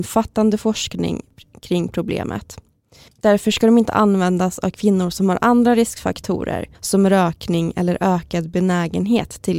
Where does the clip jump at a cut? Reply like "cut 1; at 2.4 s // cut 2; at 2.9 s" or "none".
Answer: cut 1; at 3.1 s // cut 2; at 6.7 s

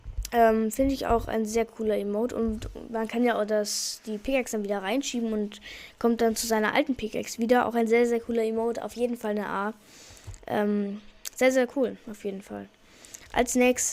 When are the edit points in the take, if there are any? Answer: none

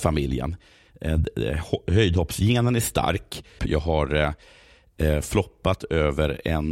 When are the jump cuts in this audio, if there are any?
cut 1; at 3.6 s

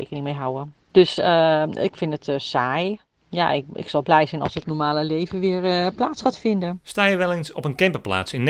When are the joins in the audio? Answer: none

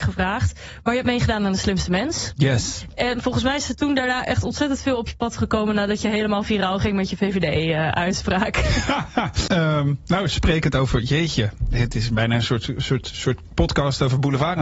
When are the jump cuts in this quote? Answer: cut 1; at 9.5 s

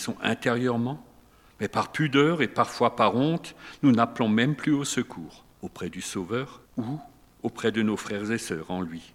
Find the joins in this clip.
cut 1; at 5.5 s // cut 2; at 6.7 s

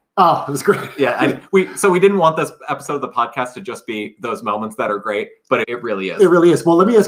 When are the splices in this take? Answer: cut 1; at 5.6 s

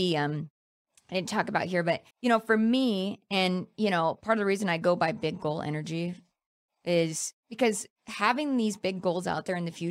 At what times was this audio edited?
cut 1; at 2.1 s // cut 2; at 7.4 s

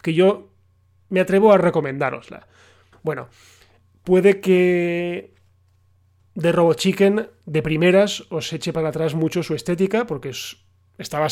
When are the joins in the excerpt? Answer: cut 1; at 2.9 s

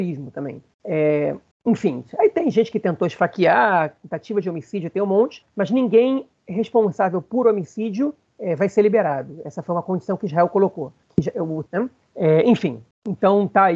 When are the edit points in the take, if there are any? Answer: cut 1; at 11.7 s

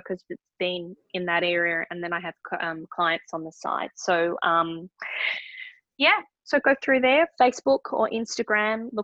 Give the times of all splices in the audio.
none

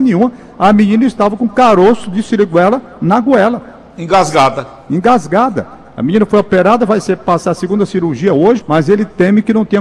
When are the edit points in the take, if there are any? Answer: cut 1; at 8.6 s

